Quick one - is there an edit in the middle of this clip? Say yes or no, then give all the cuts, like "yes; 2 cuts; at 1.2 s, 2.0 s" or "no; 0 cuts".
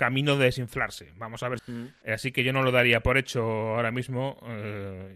yes; 1 cut; at 1.6 s